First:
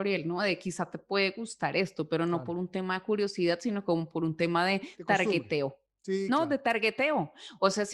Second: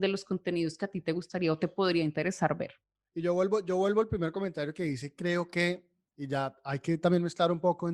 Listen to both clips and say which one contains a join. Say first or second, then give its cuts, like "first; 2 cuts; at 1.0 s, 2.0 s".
second; 1 cut; at 6.0 s